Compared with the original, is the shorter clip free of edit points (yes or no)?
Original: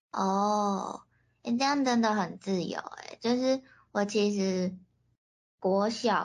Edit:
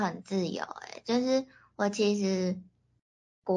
yes